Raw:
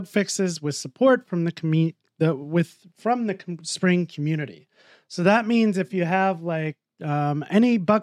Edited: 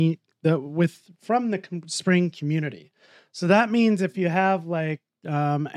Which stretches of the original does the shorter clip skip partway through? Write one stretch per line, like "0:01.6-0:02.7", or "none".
none